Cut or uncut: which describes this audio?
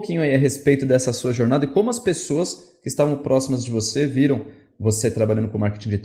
uncut